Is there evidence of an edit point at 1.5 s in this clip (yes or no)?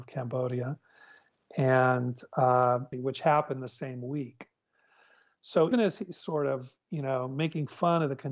no